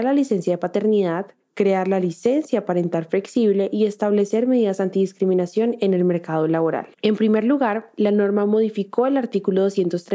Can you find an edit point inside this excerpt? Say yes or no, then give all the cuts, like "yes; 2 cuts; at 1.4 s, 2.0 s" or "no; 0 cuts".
yes; 2 cuts; at 1.4 s, 6.9 s